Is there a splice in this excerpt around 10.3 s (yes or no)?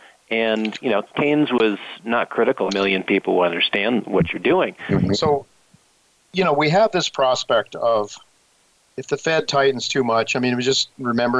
no